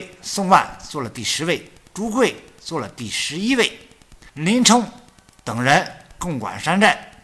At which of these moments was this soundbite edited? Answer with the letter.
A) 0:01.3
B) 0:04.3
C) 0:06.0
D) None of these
B